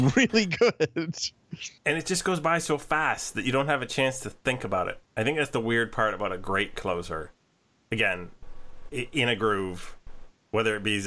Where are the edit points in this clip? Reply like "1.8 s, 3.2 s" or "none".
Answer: 1.8 s, 8.9 s